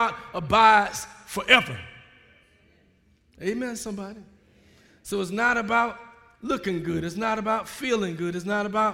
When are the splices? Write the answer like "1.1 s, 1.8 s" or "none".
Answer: none